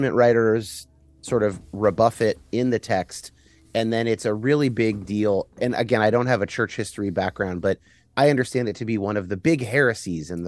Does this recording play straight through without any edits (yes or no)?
yes